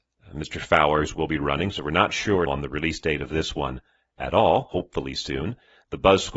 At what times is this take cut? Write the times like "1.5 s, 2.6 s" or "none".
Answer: 2.5 s